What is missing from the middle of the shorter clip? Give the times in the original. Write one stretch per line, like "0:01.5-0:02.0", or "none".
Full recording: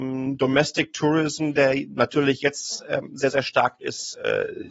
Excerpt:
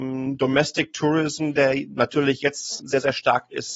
0:02.8-0:03.1